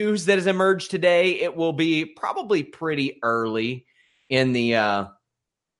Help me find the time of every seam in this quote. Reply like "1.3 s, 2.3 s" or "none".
none